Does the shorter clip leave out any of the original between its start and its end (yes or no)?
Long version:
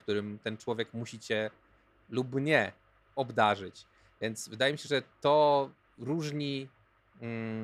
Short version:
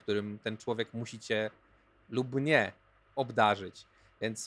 no